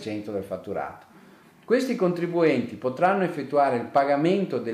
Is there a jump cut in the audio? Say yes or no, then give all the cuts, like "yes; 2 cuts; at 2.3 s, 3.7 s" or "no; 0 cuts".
no; 0 cuts